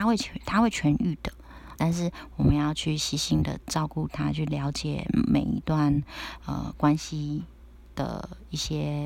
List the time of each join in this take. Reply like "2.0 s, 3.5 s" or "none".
1.8 s

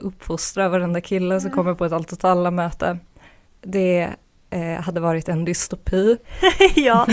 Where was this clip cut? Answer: 6.2 s

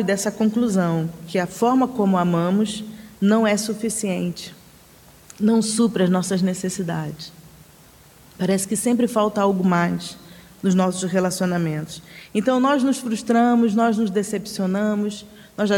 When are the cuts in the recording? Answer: 8.2 s

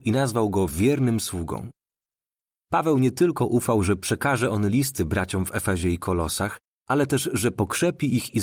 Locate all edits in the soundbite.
none

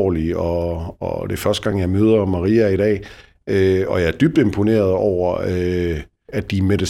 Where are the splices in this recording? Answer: none

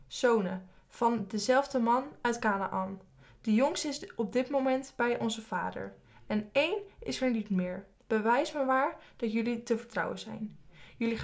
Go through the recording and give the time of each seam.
8.0 s

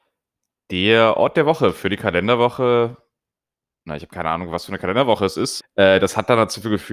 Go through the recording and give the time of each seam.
5.6 s

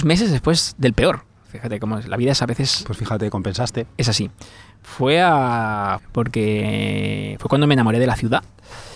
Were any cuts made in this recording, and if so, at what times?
6.0 s

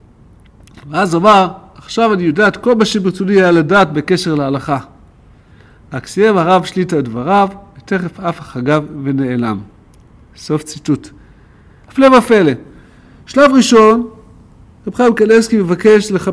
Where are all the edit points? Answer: none

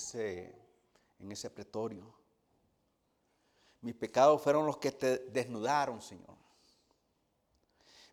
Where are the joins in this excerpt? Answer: none

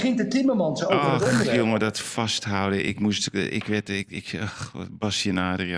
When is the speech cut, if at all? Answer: 4.1 s

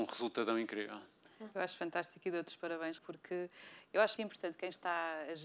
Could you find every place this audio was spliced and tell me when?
3.0 s, 4.2 s

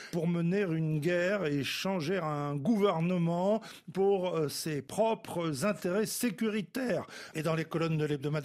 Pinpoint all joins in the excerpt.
7.3 s

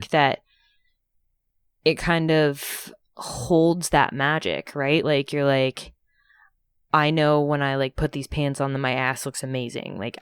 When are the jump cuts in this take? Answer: none

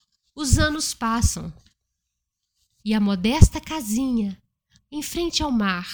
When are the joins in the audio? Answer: 2.8 s, 4.8 s

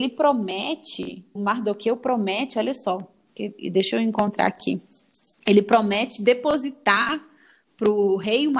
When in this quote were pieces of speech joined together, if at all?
1.4 s, 5.4 s

